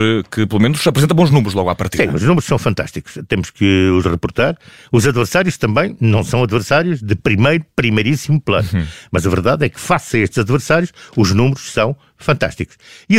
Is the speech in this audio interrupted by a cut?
no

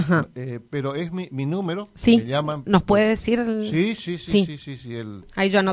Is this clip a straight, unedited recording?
yes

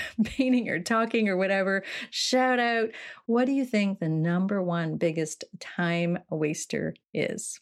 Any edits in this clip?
no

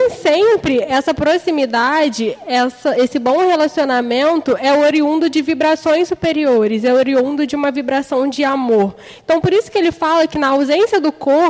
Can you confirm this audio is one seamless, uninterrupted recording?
yes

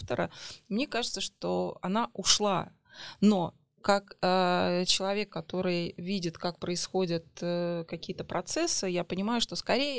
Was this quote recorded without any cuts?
yes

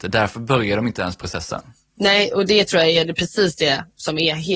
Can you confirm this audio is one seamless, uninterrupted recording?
yes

